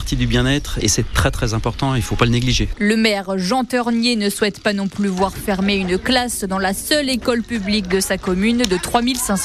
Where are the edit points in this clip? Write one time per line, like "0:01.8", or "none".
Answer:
none